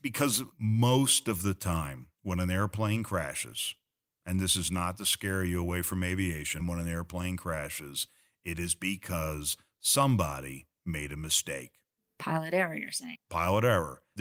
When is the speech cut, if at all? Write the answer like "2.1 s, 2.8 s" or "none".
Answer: 2.1 s, 6.6 s